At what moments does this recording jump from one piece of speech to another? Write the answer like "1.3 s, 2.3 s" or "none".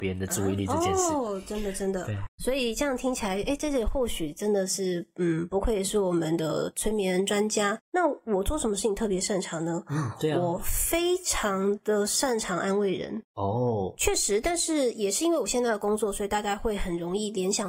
7.8 s, 14.0 s